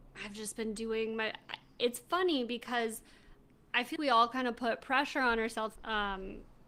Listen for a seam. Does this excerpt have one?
yes; 2 cuts; at 4.0 s, 5.8 s

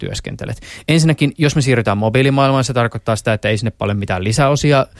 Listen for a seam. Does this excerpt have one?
no; 0 cuts

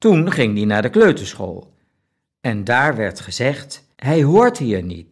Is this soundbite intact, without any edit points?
no; 1 cut; at 3.9 s

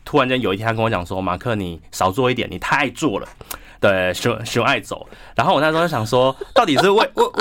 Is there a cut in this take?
no; 0 cuts

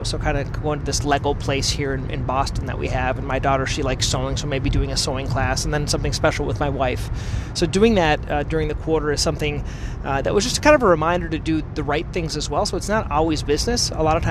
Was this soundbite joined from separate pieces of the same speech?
no; 0 cuts

